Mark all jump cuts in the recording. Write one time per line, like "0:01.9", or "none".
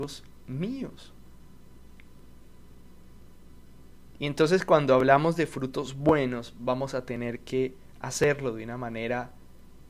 0:04.2